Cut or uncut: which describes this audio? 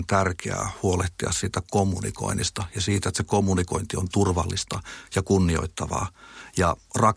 uncut